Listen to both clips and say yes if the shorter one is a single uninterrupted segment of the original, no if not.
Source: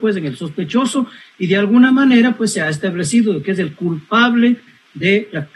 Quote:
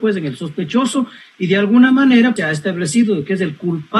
no